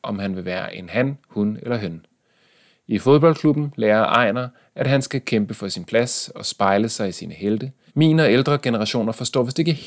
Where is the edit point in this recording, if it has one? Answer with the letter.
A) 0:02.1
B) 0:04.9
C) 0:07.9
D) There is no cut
C